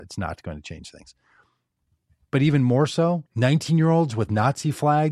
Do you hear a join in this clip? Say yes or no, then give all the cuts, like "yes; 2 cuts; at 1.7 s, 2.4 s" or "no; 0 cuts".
yes; 1 cut; at 3.3 s